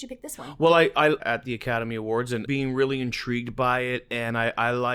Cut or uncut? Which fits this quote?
cut